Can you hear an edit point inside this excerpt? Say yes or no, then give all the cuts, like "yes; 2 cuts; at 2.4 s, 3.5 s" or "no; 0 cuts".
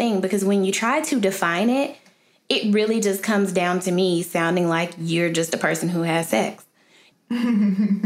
yes; 1 cut; at 7.1 s